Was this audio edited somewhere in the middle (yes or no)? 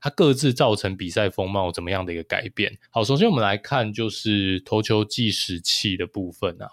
yes